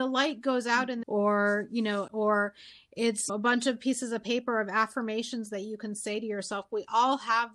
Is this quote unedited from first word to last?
no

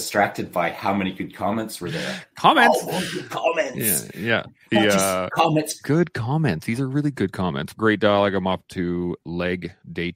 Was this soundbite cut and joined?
yes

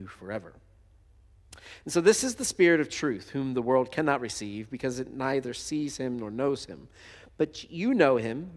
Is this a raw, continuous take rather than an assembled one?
yes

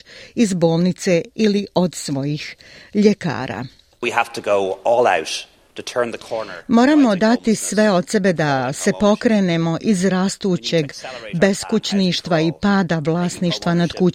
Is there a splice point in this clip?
yes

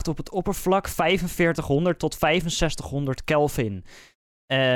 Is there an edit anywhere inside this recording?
no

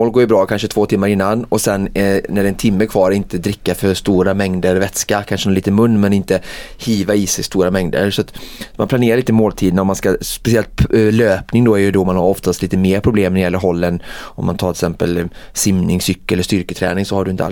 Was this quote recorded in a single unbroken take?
yes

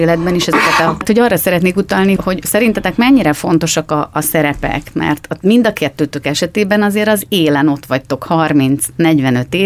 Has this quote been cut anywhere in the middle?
yes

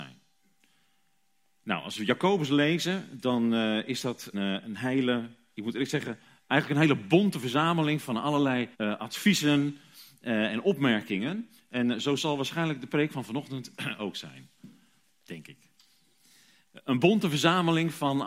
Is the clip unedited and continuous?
no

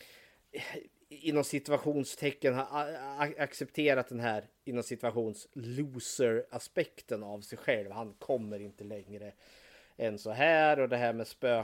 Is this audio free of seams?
yes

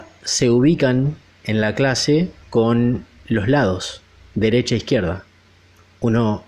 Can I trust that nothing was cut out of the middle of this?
no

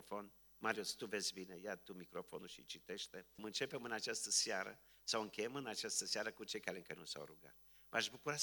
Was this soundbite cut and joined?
yes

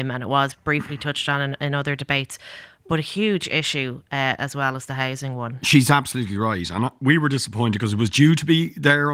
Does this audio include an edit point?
no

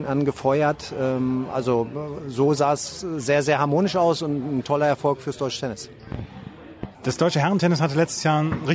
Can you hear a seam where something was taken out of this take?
yes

